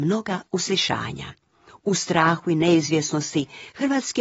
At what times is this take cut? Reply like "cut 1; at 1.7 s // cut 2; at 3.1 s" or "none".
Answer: cut 1; at 1.7 s